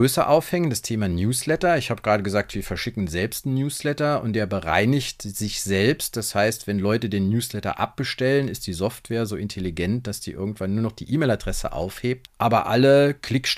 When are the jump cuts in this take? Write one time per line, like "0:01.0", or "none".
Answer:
0:12.3